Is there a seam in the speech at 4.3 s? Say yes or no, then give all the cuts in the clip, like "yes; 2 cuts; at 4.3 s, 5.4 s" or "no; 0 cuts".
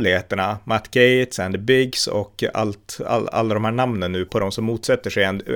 yes; 1 cut; at 4.3 s